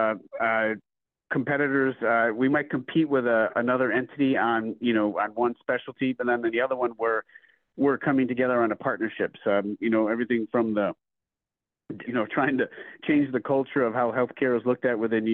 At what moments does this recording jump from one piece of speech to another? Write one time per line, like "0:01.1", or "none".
0:09.4
0:12.0